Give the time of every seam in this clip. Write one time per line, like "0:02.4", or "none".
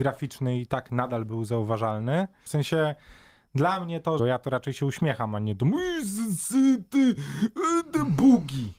0:02.5
0:04.2